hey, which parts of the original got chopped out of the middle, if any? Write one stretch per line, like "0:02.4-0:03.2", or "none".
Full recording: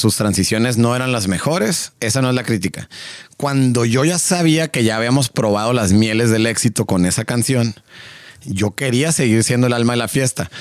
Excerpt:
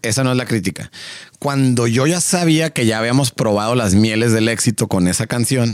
none